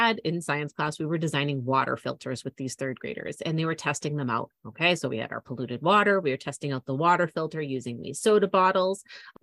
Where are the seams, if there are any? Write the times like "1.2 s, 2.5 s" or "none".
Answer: none